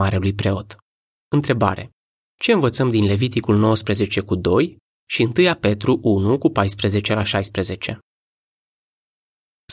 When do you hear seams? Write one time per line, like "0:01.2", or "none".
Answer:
0:01.2